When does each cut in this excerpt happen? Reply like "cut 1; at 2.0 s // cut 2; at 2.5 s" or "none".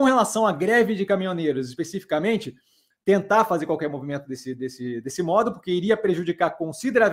cut 1; at 2.9 s